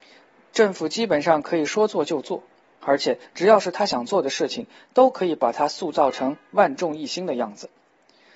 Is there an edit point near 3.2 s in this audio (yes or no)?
yes